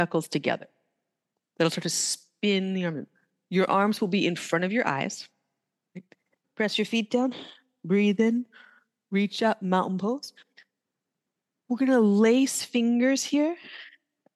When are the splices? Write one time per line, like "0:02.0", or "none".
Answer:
0:06.4